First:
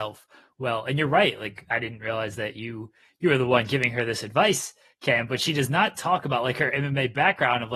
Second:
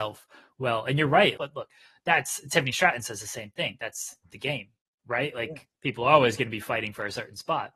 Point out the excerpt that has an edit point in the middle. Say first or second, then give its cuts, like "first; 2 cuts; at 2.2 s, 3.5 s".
second; 1 cut; at 1.4 s